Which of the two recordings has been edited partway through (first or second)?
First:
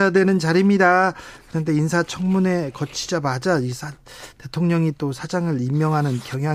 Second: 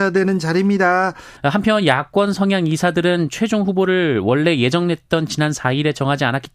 second